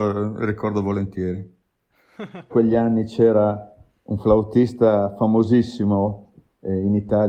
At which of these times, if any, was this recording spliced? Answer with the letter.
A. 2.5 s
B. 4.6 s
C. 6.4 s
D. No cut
A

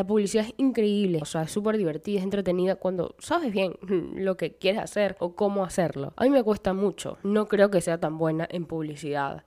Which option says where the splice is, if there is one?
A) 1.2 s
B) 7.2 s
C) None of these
A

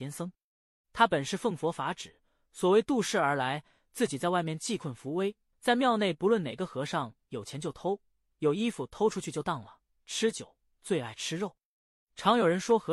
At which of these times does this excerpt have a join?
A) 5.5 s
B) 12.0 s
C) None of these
A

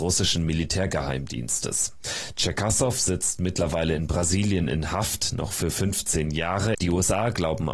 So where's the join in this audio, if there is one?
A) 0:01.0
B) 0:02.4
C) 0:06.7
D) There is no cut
C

